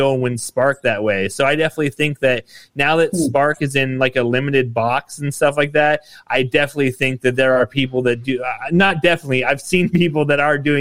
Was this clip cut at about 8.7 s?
no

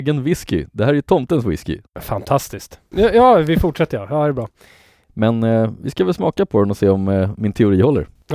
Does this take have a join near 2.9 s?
yes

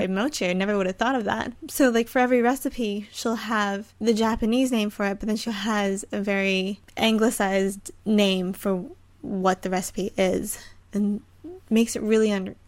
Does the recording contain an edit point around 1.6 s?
no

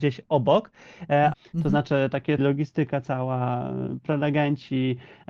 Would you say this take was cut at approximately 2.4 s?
yes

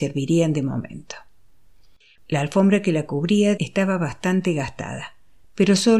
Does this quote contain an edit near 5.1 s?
no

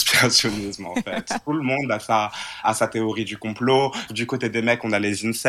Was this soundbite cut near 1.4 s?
no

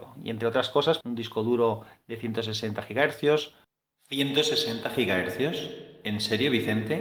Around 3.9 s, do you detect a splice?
no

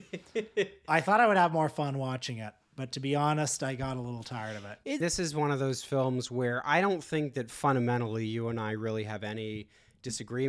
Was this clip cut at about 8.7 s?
no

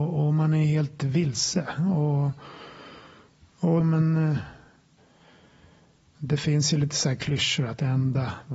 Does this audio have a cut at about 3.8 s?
yes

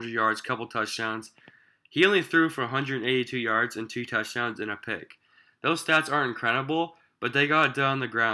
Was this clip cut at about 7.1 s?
no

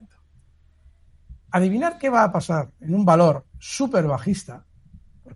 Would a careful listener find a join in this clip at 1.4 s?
yes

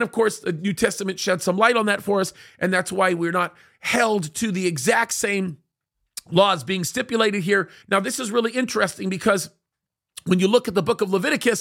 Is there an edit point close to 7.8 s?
yes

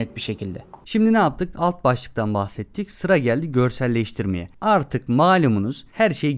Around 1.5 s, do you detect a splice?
yes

